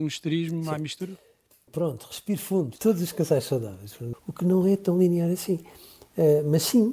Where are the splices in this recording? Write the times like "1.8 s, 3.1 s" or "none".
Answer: 1.7 s, 2.8 s, 4.1 s